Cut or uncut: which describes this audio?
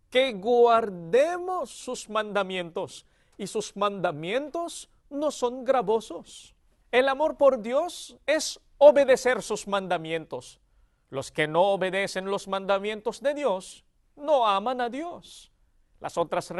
uncut